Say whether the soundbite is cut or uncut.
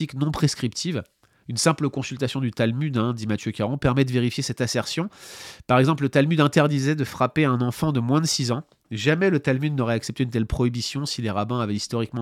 uncut